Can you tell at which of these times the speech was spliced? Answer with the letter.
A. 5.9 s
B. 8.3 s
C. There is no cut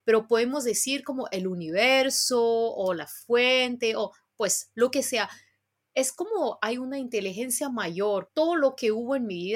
B